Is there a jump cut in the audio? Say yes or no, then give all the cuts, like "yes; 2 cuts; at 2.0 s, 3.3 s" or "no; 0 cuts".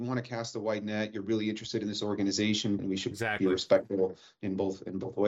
yes; 1 cut; at 2.8 s